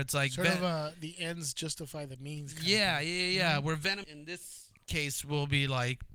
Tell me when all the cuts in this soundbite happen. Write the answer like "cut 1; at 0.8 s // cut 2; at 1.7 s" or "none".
cut 1; at 4.0 s